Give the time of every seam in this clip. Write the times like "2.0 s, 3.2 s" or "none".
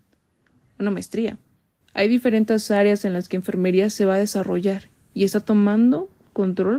1.8 s